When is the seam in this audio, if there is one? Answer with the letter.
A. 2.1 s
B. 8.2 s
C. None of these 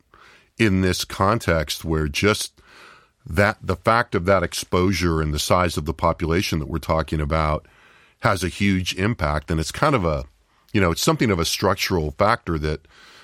C